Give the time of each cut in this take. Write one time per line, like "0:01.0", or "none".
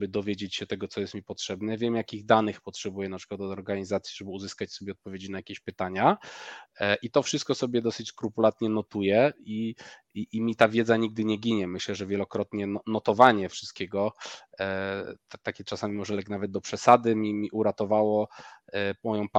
none